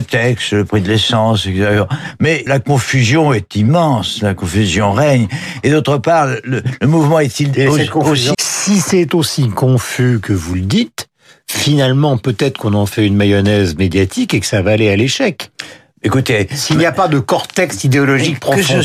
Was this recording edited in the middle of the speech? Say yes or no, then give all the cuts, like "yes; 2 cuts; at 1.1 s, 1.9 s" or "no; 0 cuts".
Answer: yes; 2 cuts; at 2.5 s, 8.3 s